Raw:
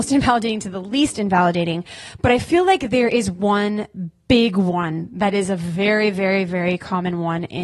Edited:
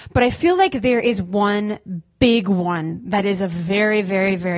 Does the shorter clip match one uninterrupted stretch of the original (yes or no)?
yes